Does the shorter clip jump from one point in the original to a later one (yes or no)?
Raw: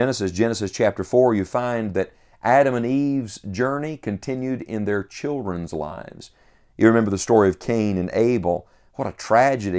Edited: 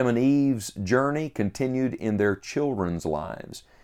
no